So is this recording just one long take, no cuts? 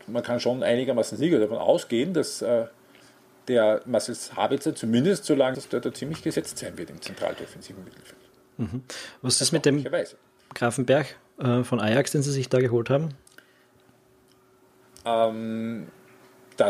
no; 1 cut; at 5.5 s

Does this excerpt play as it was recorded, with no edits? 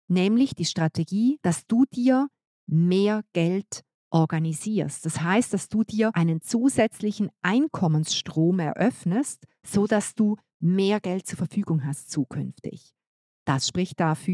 yes; 0 cuts

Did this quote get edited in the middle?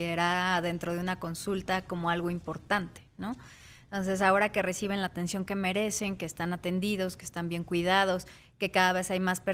no; 0 cuts

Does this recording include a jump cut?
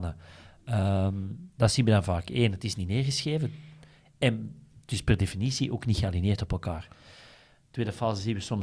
no; 0 cuts

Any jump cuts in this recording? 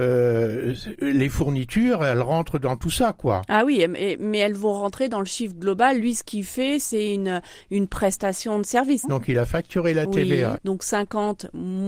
yes; 2 cuts; at 9.0 s, 10.6 s

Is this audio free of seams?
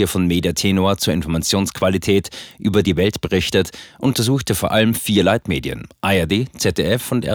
no; 1 cut; at 2.8 s

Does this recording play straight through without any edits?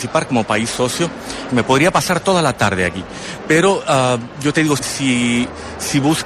no; 2 cuts; at 1.5 s, 4.8 s

